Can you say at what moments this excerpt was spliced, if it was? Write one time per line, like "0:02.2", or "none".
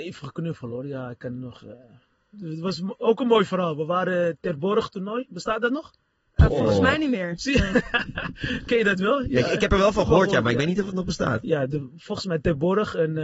none